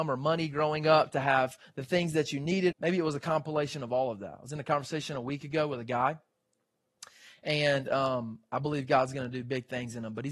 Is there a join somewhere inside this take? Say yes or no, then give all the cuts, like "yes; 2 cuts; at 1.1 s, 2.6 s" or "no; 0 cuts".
yes; 1 cut; at 2.7 s